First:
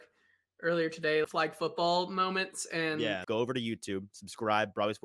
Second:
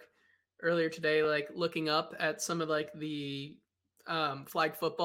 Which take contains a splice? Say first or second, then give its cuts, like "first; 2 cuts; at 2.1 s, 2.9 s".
first; 2 cuts; at 1.2 s, 3.2 s